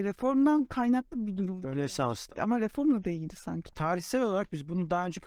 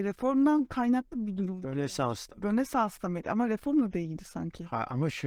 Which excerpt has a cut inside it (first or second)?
first